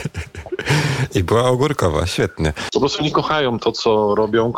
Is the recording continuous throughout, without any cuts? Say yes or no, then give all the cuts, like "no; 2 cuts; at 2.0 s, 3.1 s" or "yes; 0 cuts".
no; 1 cut; at 2.7 s